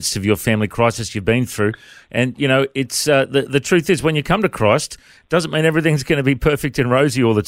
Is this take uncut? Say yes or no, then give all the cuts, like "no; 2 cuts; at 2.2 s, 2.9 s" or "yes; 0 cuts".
yes; 0 cuts